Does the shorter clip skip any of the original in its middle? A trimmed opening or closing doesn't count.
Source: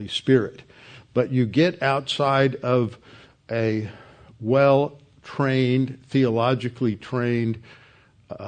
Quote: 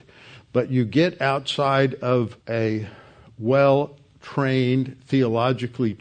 yes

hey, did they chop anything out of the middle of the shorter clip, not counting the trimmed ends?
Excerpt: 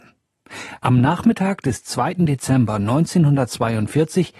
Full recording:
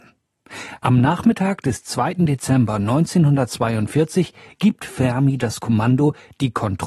no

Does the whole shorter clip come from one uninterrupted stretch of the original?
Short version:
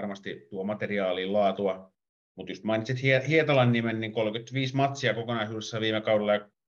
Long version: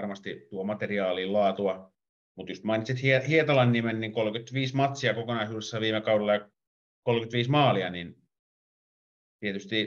yes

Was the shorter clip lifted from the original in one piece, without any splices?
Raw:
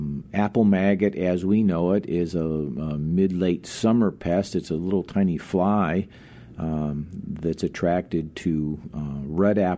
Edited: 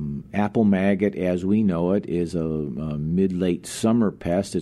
yes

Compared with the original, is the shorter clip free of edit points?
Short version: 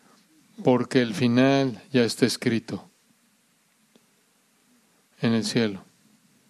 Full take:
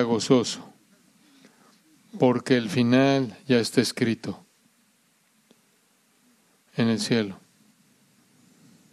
yes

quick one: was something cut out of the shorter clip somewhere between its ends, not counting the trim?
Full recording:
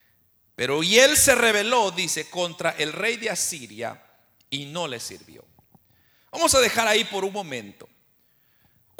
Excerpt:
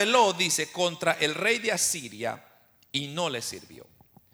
no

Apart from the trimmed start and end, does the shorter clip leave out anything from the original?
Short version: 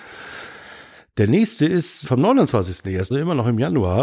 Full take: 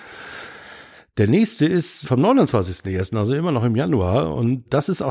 yes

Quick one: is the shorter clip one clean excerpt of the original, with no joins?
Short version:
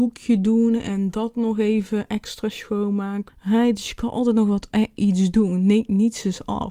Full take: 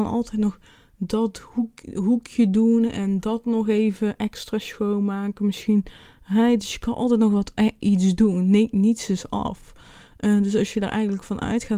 no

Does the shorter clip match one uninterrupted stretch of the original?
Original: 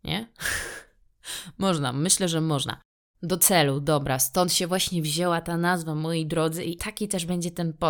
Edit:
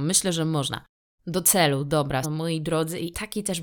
no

